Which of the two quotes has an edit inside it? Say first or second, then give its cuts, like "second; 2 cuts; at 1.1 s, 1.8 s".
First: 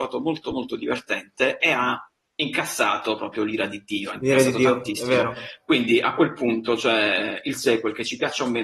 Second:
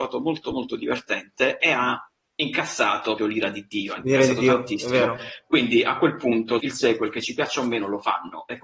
second; 2 cuts; at 3.2 s, 6.6 s